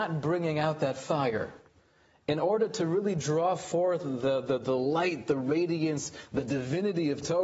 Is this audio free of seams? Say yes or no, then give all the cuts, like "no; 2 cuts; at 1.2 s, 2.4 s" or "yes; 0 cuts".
yes; 0 cuts